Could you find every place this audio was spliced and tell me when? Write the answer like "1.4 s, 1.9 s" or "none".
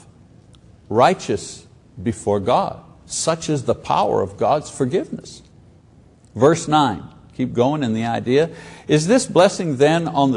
none